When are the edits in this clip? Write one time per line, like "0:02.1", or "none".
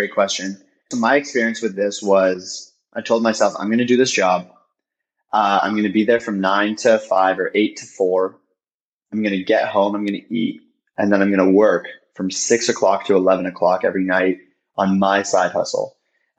none